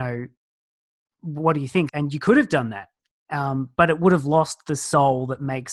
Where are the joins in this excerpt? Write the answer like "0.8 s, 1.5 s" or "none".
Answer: 1.9 s